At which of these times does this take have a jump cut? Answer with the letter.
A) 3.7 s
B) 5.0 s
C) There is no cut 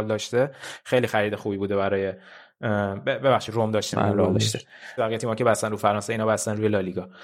B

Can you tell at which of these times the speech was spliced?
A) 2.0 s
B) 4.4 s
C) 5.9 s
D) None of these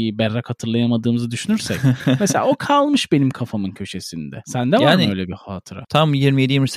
C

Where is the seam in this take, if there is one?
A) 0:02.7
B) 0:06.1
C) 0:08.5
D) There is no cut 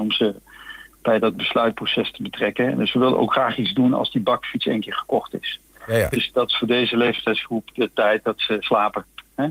B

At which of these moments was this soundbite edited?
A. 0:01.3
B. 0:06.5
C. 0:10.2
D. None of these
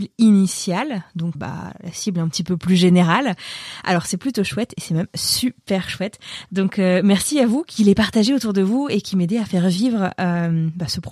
A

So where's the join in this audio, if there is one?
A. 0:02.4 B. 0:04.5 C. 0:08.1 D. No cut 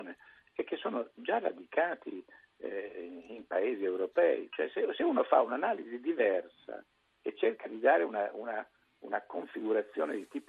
B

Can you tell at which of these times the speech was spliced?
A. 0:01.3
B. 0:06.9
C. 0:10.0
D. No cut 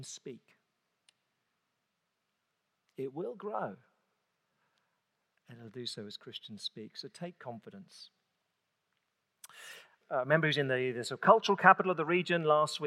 C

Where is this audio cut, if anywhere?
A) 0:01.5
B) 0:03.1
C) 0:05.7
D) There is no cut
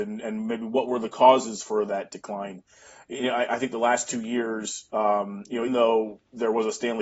C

